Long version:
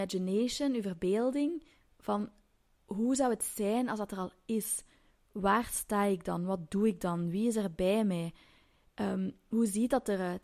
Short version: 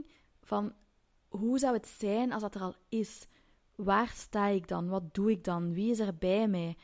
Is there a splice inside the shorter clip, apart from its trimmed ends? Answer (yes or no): no